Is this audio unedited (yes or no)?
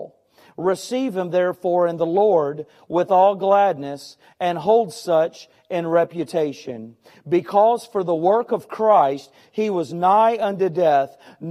yes